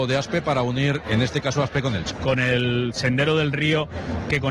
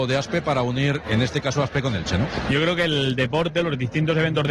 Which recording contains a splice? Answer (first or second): first